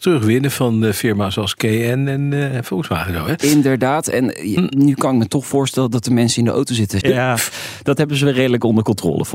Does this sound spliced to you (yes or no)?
yes